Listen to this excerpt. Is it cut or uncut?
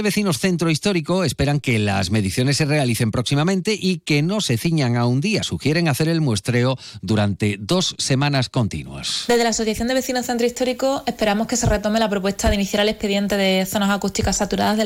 uncut